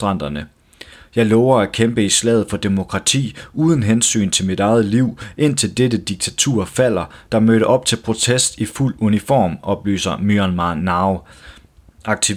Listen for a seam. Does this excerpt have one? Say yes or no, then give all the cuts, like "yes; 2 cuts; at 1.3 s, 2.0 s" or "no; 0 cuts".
yes; 1 cut; at 7.2 s